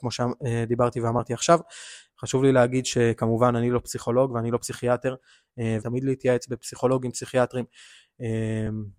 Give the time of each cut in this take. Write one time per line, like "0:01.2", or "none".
0:02.1
0:05.8